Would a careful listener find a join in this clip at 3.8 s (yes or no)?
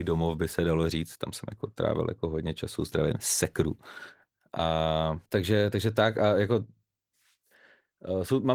no